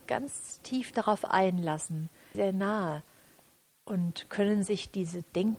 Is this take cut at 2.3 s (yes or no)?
yes